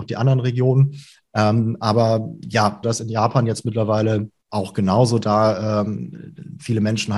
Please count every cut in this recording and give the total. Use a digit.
3